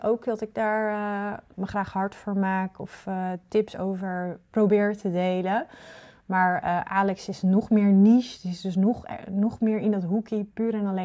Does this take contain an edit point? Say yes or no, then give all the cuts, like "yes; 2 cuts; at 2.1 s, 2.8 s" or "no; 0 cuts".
yes; 1 cut; at 1.5 s